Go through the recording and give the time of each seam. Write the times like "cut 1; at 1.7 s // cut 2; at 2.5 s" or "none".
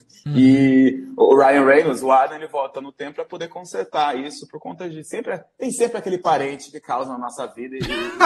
none